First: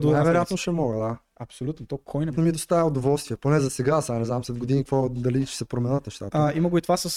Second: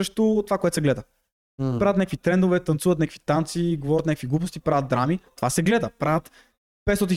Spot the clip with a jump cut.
first; 1 cut; at 2.3 s

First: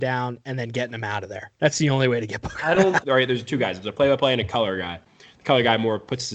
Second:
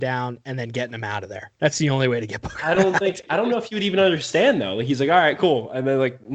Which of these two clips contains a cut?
first; 1 cut; at 3.0 s

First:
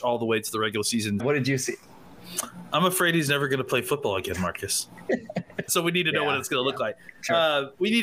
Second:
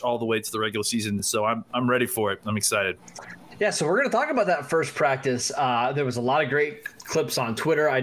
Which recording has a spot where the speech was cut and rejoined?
first; 2 cuts; at 1.2 s, 5.7 s

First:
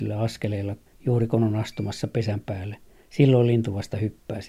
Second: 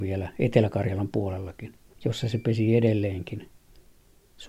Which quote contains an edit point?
second; 1 cut; at 1.9 s

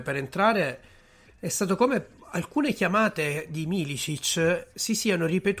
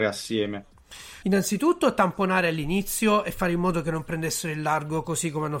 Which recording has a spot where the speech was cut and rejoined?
second; 1 cut; at 1.2 s

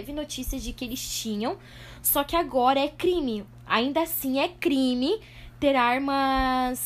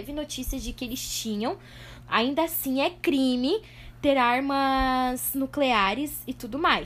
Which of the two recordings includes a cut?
second; 1 cut; at 2.0 s

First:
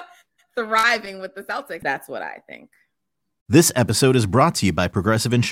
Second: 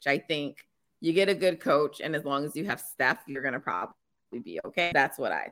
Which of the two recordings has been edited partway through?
first; 1 cut; at 1.8 s

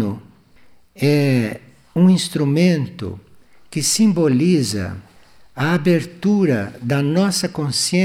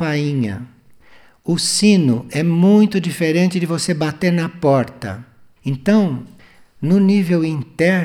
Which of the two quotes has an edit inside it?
second; 1 cut; at 5.6 s

